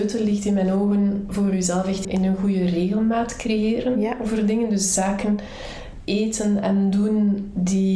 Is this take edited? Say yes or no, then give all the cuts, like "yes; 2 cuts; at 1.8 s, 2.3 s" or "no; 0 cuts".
yes; 1 cut; at 2.0 s